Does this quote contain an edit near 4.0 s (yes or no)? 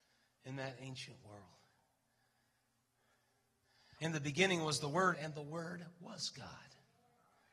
yes